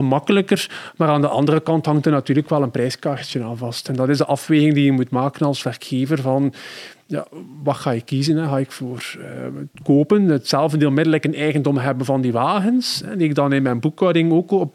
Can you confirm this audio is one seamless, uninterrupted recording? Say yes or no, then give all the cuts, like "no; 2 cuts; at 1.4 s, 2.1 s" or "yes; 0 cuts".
yes; 0 cuts